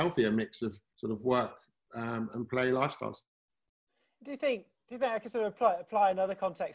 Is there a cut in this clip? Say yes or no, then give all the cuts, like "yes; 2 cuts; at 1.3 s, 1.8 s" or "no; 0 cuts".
no; 0 cuts